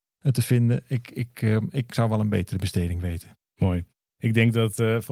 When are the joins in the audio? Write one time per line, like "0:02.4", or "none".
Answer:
none